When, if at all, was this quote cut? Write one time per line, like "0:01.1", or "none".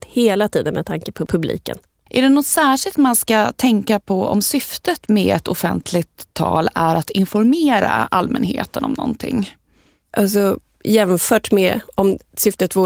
0:10.1